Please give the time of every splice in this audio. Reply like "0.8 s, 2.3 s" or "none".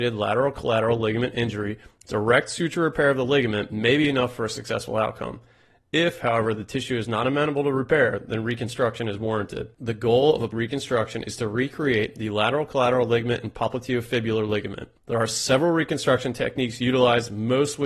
15.0 s